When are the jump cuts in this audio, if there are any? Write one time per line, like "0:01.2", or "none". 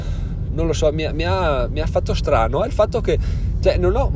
none